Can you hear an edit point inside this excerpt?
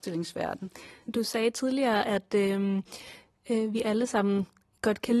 no; 0 cuts

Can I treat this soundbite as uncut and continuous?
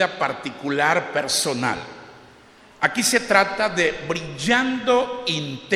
yes; 0 cuts

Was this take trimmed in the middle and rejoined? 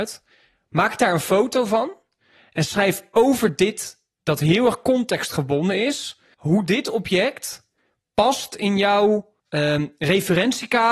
yes; 3 cuts; at 4.2 s, 6.3 s, 9.4 s

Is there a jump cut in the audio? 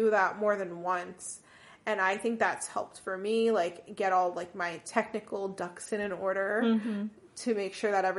no; 0 cuts

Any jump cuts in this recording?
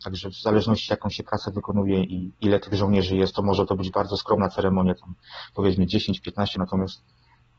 yes; 2 cuts; at 2.1 s, 6.5 s

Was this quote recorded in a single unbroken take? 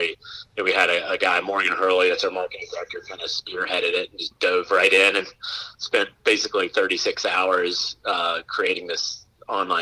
yes; 0 cuts

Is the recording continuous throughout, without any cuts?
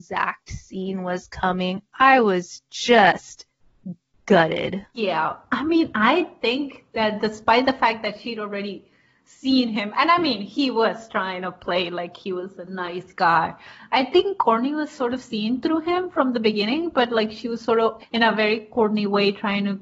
no; 2 cuts; at 4.9 s, 18.0 s

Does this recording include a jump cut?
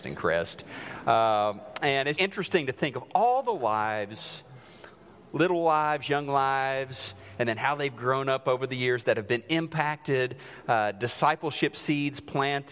yes; 1 cut; at 2.2 s

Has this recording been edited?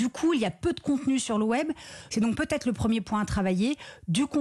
yes; 1 cut; at 2.1 s

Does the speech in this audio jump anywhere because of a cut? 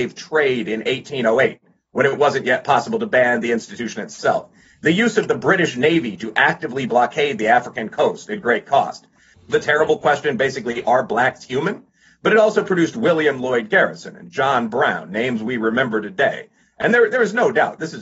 yes; 1 cut; at 9.3 s

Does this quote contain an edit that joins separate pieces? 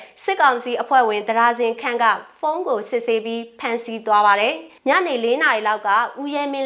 yes; 1 cut; at 4.8 s

